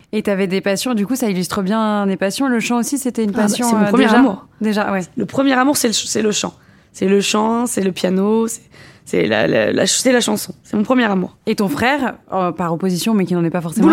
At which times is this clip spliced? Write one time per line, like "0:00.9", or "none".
none

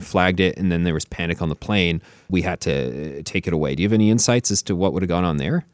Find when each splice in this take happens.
0:02.3

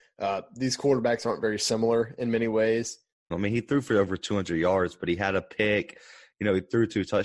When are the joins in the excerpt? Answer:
0:03.3

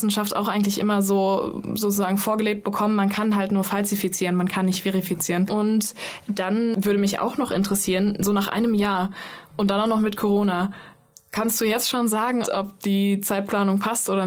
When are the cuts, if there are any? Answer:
0:05.5
0:12.4

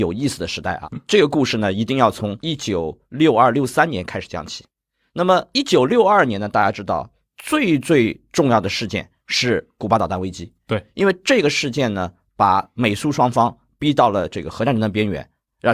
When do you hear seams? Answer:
none

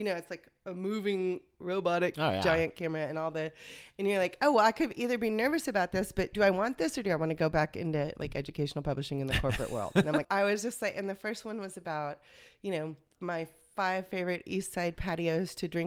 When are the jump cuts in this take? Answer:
0:06.3
0:10.2

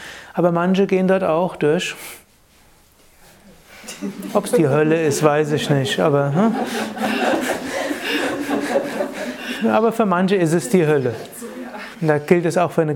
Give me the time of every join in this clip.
0:11.9

